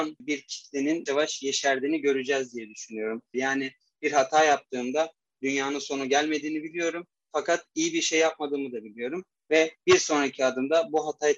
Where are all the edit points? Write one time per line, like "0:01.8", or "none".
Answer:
0:01.1
0:03.3

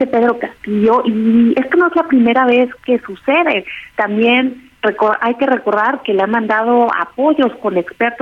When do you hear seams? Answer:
none

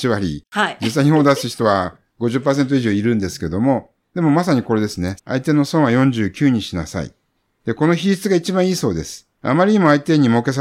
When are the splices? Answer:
0:05.2
0:09.3

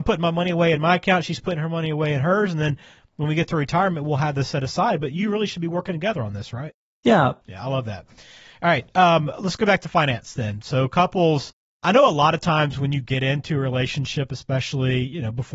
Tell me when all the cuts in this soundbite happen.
0:07.4

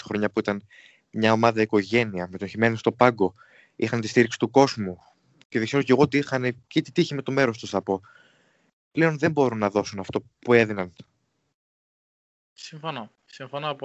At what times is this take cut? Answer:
none

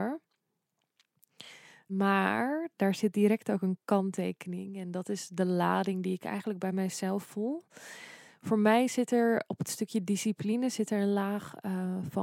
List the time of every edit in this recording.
0:01.9

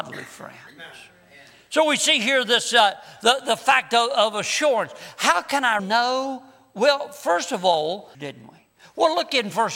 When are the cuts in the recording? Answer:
0:05.8
0:08.1

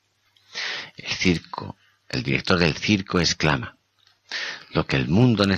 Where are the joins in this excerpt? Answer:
none

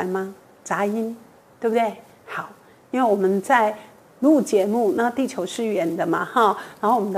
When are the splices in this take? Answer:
none

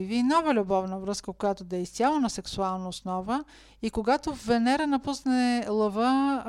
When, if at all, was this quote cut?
none

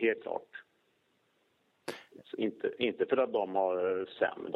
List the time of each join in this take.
none

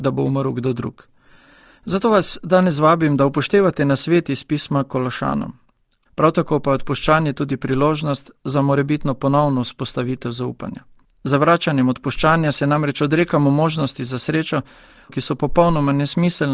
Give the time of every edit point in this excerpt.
0:06.1
0:11.0
0:15.1

